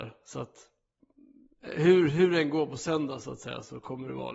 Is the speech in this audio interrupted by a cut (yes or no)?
no